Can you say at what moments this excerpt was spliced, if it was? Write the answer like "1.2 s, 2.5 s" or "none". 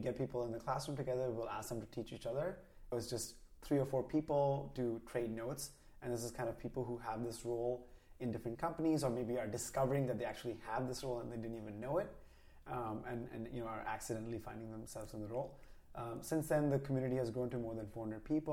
2.9 s

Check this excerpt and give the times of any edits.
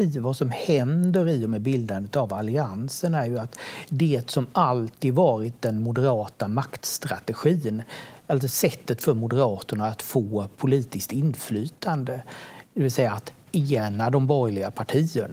none

